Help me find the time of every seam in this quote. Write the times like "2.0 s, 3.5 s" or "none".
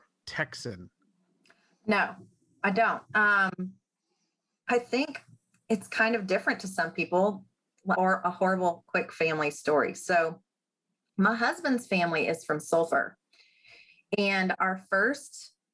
7.9 s